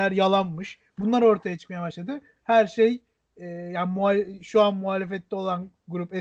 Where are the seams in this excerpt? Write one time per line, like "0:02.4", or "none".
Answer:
0:02.4